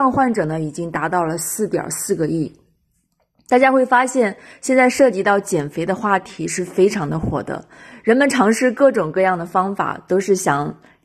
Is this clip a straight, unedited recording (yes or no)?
yes